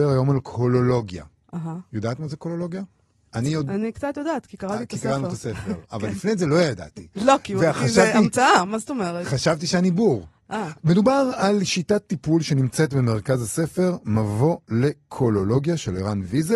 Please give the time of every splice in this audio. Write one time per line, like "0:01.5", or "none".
0:10.7